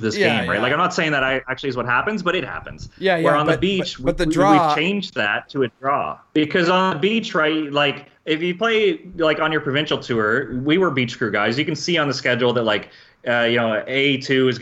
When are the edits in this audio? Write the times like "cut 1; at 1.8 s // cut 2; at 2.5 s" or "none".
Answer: none